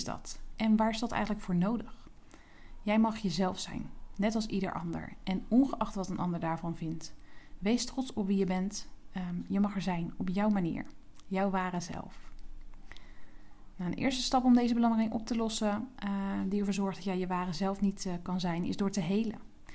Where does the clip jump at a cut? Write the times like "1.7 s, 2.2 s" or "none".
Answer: none